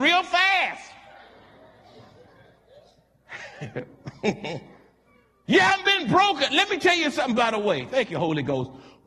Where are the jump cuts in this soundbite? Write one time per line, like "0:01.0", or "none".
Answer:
none